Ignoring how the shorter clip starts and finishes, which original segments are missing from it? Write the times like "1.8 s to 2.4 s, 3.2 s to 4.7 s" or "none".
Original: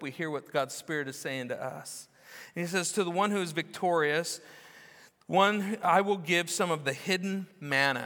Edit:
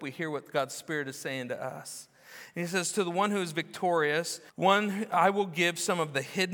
4.5 s to 5.2 s